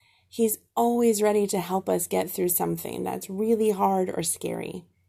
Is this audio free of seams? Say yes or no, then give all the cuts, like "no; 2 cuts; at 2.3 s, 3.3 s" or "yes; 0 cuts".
yes; 0 cuts